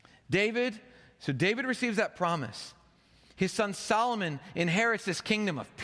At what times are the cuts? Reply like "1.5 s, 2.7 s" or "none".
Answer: none